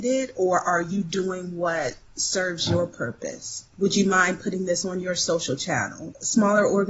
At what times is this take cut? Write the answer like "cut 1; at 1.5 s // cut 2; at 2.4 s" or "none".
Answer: cut 1; at 3.7 s